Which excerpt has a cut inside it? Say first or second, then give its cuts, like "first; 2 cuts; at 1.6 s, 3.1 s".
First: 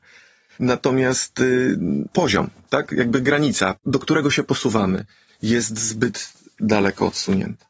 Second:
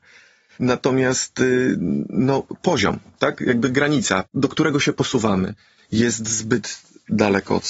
first; 1 cut; at 2.1 s